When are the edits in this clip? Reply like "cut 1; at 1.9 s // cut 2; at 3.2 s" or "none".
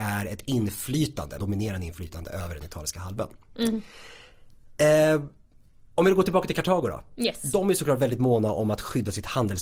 cut 1; at 1.4 s